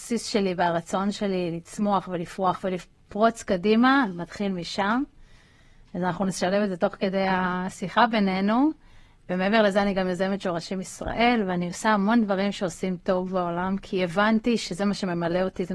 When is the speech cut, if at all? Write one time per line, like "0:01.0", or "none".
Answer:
none